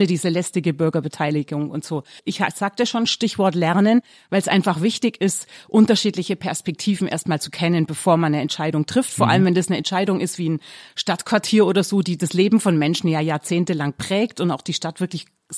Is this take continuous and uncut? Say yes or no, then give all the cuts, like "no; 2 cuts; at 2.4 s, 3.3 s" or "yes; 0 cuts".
no; 1 cut; at 2.2 s